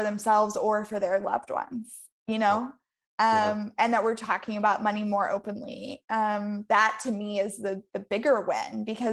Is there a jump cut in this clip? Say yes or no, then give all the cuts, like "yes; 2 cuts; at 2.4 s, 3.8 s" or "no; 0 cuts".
no; 0 cuts